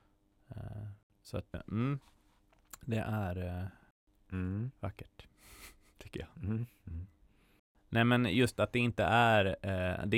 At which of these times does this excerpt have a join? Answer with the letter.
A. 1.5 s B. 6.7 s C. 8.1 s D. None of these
A